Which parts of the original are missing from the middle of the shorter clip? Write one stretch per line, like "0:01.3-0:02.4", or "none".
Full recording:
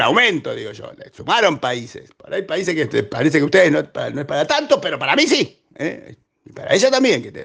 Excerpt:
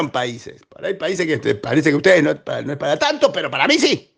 none